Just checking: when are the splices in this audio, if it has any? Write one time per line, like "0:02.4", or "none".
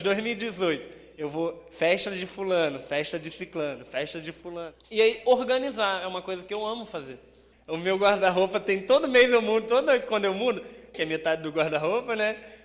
0:07.5
0:10.9